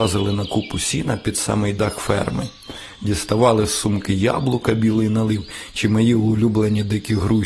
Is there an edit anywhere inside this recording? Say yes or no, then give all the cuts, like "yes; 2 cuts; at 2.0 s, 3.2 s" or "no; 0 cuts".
no; 0 cuts